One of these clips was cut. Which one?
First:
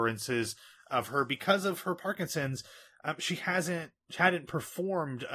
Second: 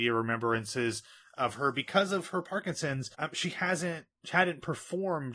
second; 1 cut; at 3.1 s

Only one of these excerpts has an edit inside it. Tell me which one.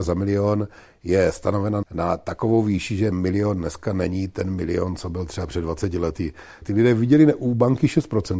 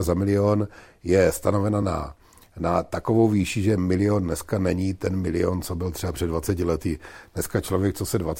first; 2 cuts; at 1.8 s, 6.6 s

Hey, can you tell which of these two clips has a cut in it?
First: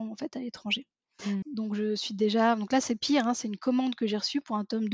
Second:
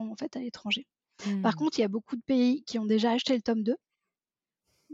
first; 1 cut; at 1.4 s

